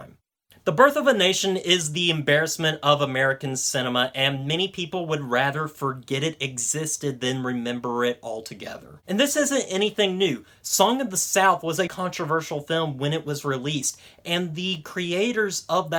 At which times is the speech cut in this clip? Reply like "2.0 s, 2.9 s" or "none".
11.9 s